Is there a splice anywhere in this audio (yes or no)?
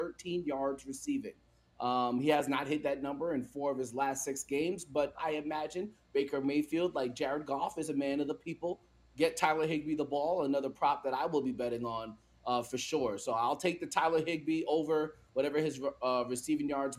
yes